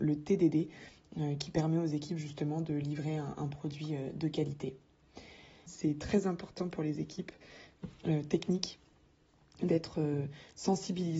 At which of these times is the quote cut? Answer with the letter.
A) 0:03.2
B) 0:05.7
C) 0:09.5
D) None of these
B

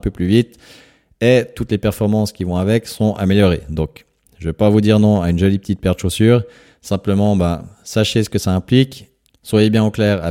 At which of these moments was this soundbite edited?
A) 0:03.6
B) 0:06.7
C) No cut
C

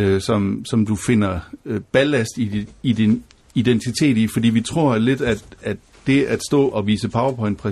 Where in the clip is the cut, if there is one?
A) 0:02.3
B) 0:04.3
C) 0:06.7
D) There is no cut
C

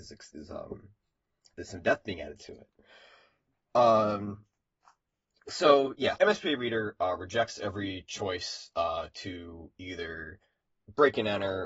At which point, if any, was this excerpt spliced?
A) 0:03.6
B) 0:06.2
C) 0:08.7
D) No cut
B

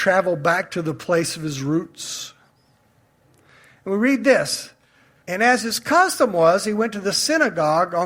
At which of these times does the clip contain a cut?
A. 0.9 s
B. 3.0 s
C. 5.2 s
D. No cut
C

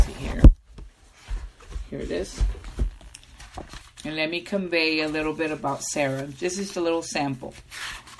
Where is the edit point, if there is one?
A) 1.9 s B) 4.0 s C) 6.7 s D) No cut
C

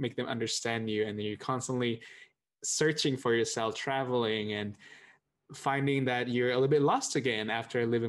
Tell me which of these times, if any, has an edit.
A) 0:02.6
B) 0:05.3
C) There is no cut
B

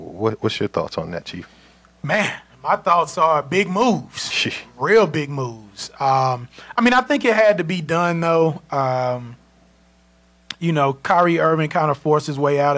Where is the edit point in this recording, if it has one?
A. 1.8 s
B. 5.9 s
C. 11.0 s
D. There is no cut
D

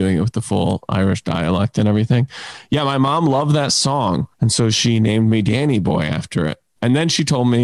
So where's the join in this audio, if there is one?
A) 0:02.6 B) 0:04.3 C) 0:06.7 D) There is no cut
B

